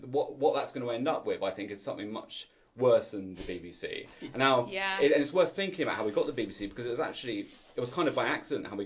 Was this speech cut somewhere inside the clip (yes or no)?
no